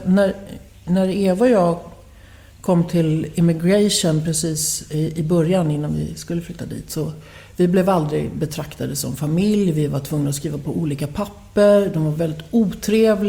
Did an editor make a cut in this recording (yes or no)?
no